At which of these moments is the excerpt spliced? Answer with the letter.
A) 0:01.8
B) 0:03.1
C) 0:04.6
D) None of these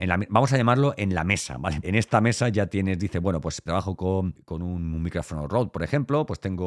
A